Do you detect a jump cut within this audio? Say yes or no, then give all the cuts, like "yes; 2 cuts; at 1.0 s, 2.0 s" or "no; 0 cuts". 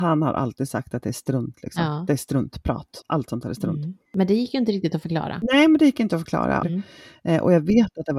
yes; 1 cut; at 6.6 s